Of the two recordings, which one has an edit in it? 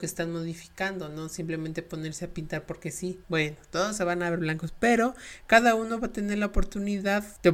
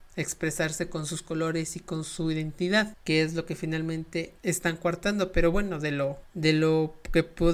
first; 1 cut; at 3.2 s

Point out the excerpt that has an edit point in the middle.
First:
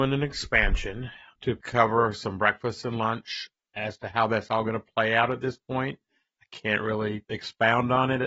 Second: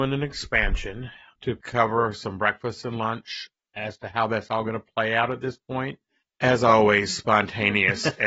second; 1 cut; at 6.2 s

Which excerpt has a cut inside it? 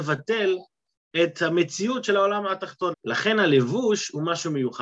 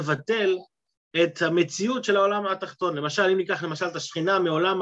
first; 1 cut; at 2.9 s

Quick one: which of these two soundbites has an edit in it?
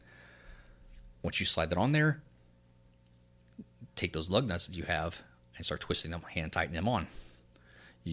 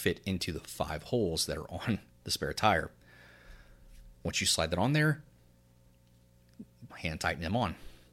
second; 1 cut; at 6.9 s

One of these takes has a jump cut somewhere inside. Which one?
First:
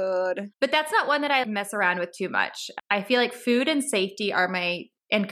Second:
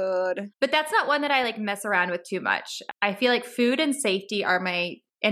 first; 1 cut; at 1.4 s

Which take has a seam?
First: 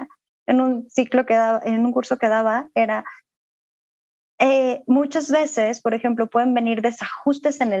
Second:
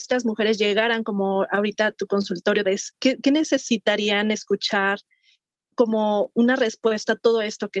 second; 1 cut; at 2.6 s

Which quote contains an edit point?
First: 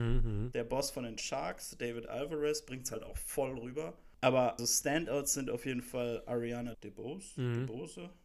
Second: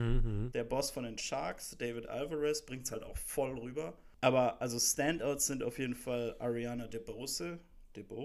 first; 2 cuts; at 4.6 s, 6.7 s

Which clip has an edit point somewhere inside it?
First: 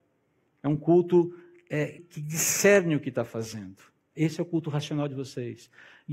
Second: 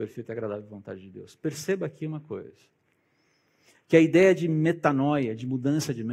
first; 1 cut; at 2.0 s

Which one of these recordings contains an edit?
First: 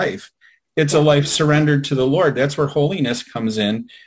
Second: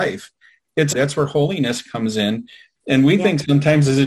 second; 1 cut; at 0.9 s

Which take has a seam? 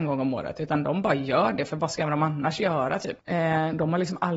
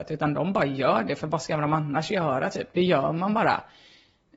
first; 1 cut; at 3.2 s

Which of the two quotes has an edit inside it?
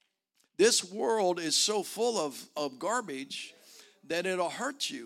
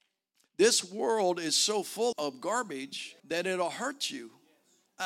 second; 2 cuts; at 2.1 s, 3.2 s

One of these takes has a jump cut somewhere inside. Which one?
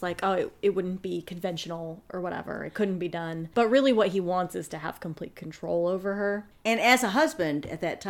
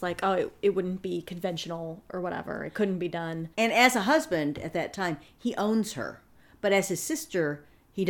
second; 1 cut; at 3.5 s

